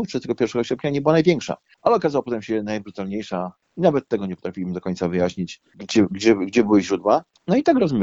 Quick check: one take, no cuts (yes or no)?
yes